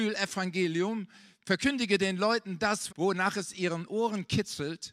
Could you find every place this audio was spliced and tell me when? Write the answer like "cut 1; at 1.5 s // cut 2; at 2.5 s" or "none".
cut 1; at 2.9 s